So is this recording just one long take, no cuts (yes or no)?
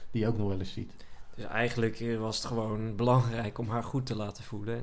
yes